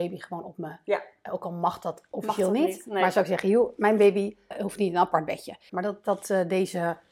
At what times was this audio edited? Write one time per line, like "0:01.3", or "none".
0:04.5
0:05.7